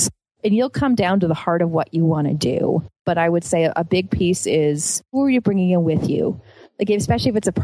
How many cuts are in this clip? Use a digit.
1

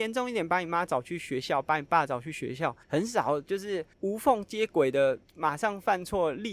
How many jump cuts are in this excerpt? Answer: 2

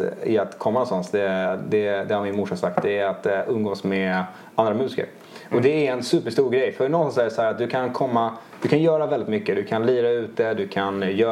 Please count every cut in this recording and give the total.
0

